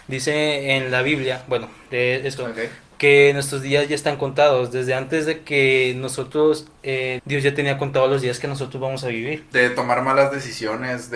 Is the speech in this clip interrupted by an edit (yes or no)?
yes